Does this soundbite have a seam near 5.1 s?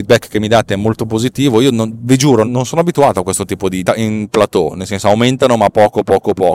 no; 2 cuts; at 2.4 s, 3.8 s

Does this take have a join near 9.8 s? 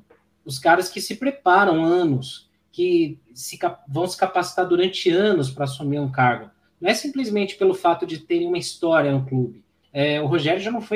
yes; 1 cut; at 9.8 s

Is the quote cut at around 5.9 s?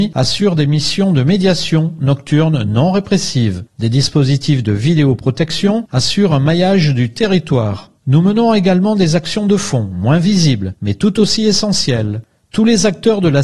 yes; 2 cuts; at 5.9 s, 8.0 s

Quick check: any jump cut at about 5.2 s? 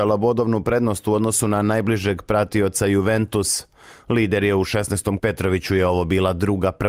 yes; 1 cut; at 5.2 s

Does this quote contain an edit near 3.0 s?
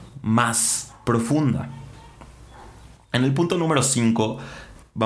no; 0 cuts

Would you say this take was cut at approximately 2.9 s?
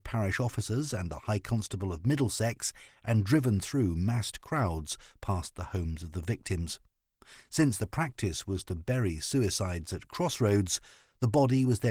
yes; 1 cut; at 2.9 s

